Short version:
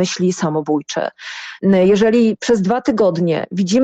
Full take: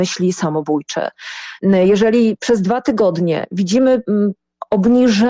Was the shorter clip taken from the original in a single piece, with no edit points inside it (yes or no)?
yes